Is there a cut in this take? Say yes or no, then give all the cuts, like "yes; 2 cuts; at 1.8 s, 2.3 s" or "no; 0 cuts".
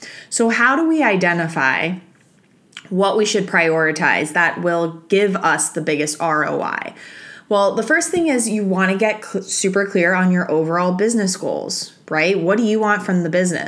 no; 0 cuts